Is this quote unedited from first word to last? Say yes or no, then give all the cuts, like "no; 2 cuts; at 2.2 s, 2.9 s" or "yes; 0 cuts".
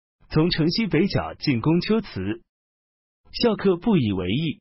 no; 1 cut; at 3.1 s